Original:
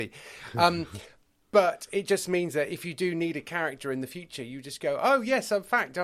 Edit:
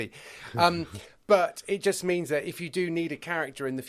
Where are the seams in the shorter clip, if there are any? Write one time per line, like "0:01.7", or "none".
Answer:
0:01.2